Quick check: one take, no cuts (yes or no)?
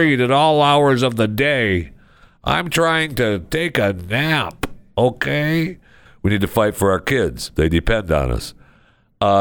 no